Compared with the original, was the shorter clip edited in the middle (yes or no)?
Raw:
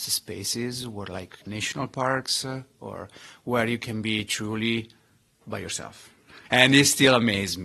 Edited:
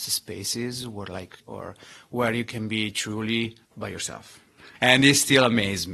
yes